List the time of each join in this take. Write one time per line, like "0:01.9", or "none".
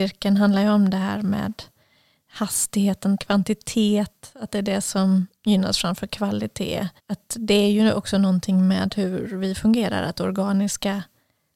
0:03.2
0:07.0